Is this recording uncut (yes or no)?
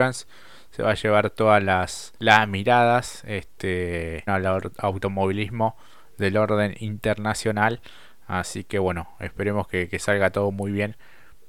no